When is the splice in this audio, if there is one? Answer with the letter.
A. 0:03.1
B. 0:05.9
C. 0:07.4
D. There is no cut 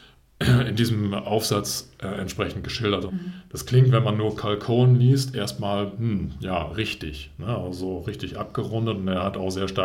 A